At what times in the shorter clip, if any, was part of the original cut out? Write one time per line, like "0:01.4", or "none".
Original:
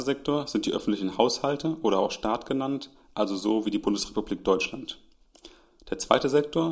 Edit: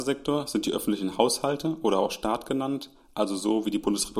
none